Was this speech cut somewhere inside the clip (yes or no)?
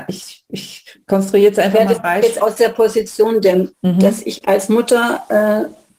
yes